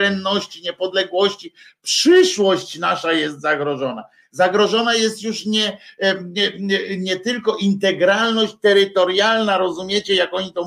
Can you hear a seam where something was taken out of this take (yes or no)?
no